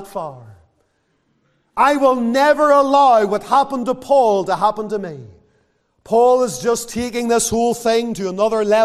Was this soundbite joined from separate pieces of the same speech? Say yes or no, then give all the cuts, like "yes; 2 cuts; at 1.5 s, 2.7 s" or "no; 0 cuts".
no; 0 cuts